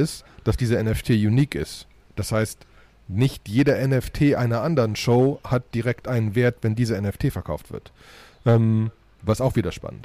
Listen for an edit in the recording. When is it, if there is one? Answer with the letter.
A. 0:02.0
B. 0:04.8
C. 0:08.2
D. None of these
D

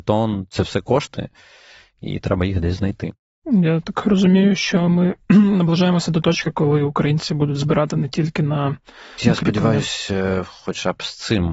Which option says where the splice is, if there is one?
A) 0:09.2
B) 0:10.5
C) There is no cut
A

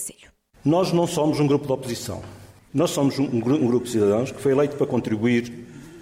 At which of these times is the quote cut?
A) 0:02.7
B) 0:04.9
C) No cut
A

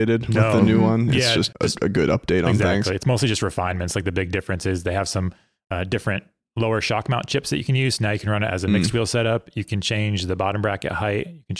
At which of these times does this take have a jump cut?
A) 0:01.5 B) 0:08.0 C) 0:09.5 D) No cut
A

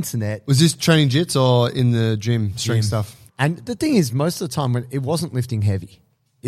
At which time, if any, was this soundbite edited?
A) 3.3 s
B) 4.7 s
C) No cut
A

